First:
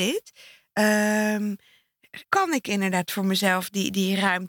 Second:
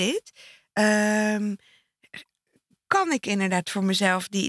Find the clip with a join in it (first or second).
first